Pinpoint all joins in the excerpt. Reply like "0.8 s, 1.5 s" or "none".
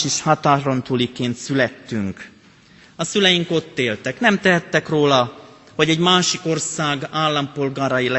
none

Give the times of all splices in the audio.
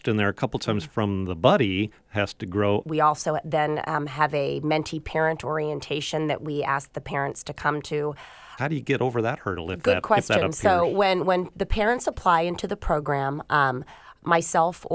2.8 s, 8.6 s

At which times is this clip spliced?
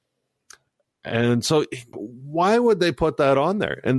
1.9 s

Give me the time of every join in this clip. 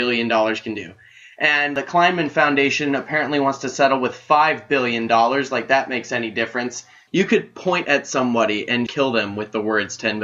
7.1 s, 8.9 s

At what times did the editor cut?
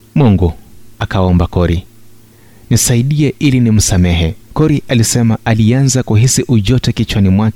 0.9 s, 4.4 s

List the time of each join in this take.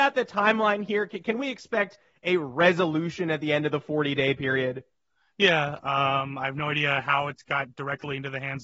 5.8 s

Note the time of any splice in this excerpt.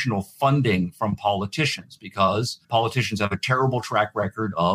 2.6 s

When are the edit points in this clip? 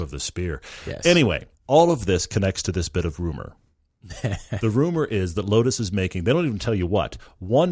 1.5 s

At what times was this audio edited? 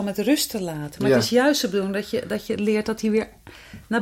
none

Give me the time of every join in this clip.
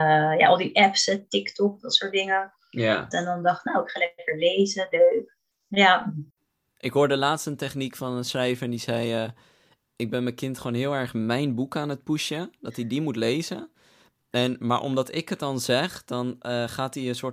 3.1 s

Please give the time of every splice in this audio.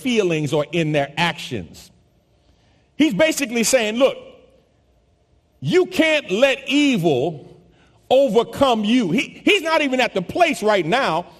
none

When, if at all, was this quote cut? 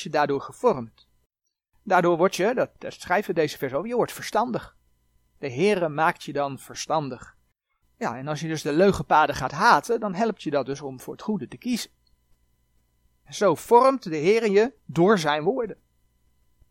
7.8 s

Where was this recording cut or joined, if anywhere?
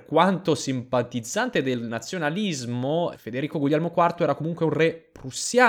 3.1 s

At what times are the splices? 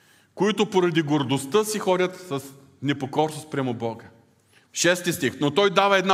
4.6 s

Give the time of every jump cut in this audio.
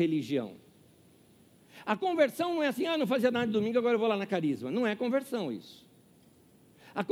none

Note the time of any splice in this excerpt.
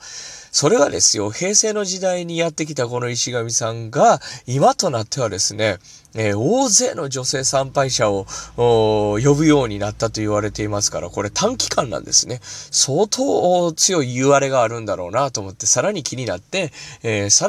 none

